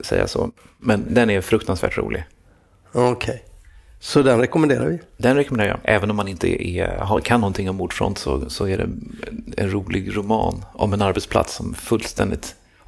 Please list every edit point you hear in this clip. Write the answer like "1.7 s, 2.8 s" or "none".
none